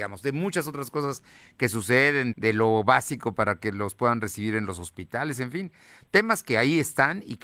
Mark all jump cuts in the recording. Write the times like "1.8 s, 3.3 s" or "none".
2.3 s